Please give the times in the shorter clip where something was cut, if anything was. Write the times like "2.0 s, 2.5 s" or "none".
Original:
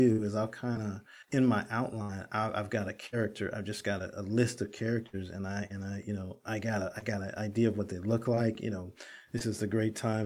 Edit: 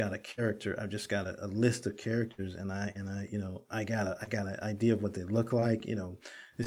none